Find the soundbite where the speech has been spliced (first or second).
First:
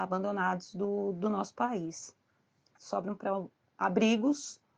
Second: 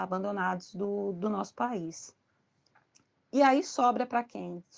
first